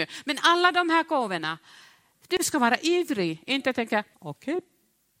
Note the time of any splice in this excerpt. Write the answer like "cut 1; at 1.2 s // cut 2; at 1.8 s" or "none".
cut 1; at 4.1 s